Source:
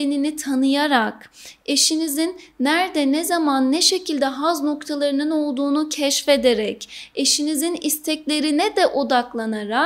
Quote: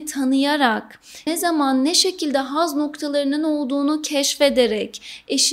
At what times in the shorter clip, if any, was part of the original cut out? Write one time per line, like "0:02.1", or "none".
0:01.3